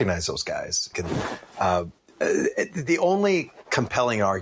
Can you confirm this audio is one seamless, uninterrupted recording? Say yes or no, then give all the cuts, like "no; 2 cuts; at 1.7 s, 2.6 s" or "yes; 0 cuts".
no; 1 cut; at 0.9 s